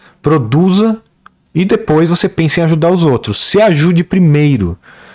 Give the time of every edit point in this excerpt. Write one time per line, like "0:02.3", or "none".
none